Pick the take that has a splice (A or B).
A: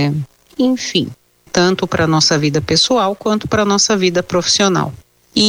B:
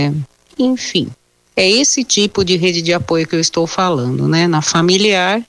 A